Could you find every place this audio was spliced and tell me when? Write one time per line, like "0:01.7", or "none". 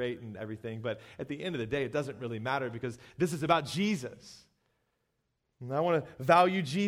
none